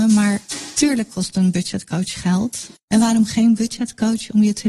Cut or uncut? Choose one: cut